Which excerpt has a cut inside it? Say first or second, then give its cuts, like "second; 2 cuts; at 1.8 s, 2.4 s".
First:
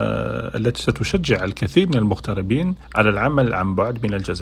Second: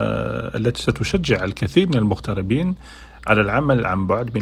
first; 1 cut; at 2.8 s